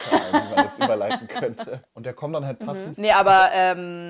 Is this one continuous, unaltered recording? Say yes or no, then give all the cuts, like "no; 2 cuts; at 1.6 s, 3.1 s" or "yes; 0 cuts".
no; 2 cuts; at 1.9 s, 2.9 s